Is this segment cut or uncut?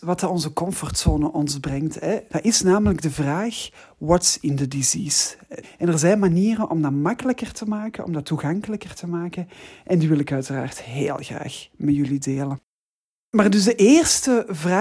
cut